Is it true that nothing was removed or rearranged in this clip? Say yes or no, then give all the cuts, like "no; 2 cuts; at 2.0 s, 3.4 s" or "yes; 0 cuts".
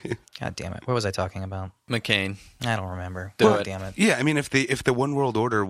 yes; 0 cuts